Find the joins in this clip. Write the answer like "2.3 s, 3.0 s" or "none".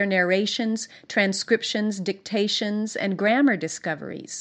none